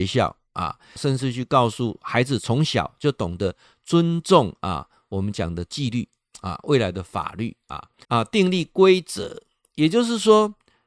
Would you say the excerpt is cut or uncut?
cut